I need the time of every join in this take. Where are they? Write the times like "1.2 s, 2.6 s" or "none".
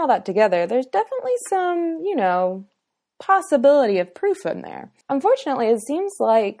5.0 s